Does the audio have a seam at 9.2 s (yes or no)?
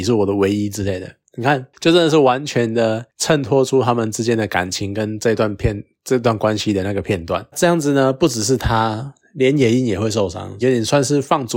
no